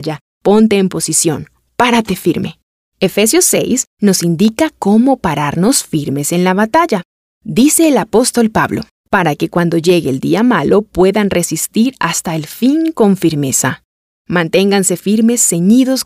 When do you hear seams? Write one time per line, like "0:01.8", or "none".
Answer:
0:08.9